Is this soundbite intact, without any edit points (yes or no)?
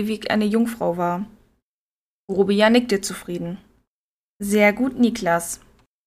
yes